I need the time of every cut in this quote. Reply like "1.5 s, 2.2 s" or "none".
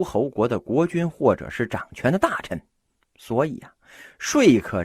none